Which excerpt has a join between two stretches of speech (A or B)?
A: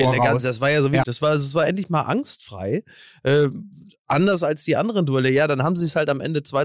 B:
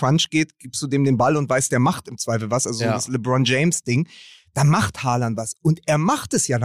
A